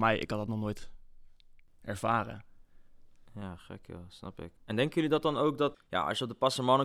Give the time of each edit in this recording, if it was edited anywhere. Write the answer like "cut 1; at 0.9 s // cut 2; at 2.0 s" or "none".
cut 1; at 4.6 s // cut 2; at 5.7 s